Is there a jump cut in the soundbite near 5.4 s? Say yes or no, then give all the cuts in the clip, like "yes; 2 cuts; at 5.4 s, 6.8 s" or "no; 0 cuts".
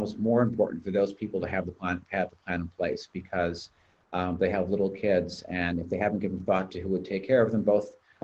no; 0 cuts